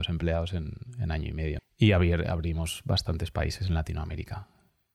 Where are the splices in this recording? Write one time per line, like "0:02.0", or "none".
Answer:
0:01.6